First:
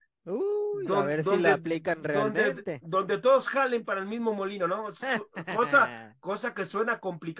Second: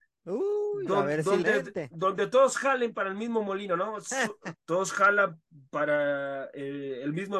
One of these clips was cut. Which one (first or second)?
second